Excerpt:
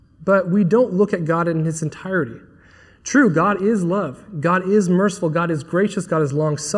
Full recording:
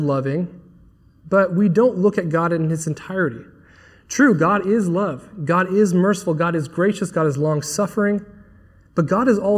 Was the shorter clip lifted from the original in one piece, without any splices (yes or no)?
yes